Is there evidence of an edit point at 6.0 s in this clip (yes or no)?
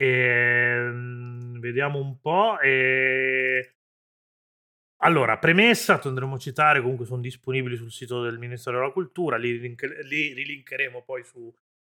yes